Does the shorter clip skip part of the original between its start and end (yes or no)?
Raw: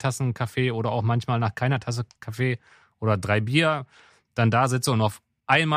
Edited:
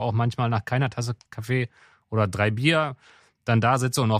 no